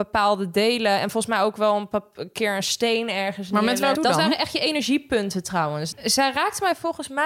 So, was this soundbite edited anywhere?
yes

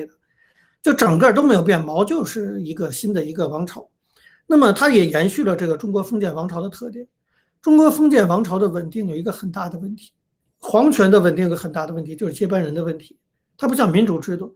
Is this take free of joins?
yes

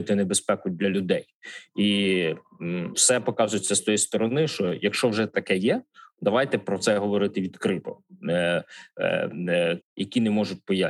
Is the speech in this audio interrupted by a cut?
yes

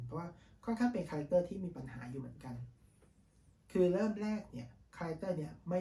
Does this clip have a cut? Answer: no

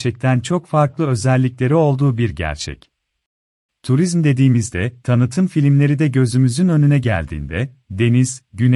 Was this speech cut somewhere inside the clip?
yes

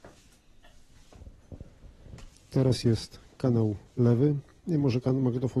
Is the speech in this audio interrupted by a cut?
no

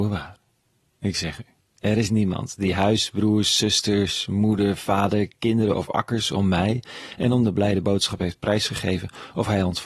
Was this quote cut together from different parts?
no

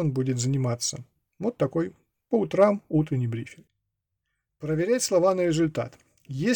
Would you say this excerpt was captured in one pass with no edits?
yes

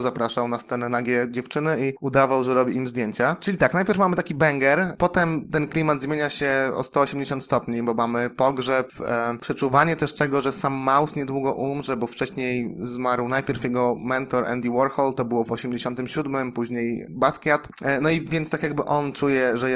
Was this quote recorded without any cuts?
yes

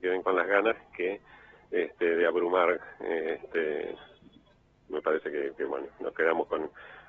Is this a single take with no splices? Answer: yes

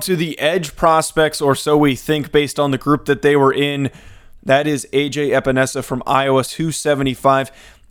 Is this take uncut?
no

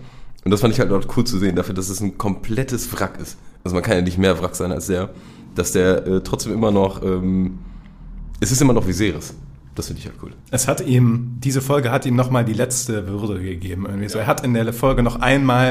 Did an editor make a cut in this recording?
yes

